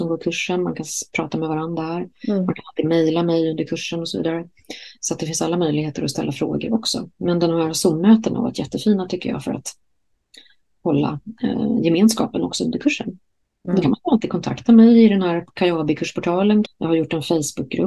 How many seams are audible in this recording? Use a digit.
2